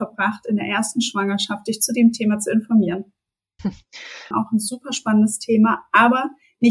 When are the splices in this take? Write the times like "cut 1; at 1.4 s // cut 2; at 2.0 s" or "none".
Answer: cut 1; at 4.3 s